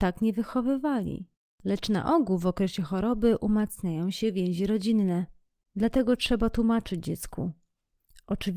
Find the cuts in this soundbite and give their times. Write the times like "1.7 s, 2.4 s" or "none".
1.5 s, 5.7 s